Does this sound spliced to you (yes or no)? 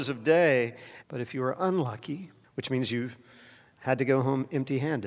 yes